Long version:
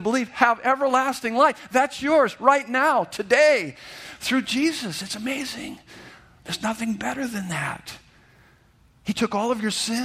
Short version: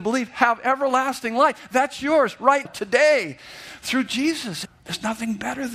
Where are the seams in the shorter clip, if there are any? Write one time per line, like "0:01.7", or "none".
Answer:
0:02.7
0:04.7